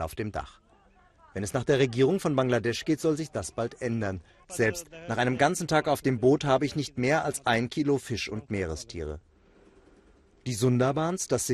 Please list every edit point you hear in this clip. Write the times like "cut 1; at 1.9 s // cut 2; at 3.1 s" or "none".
cut 1; at 4.4 s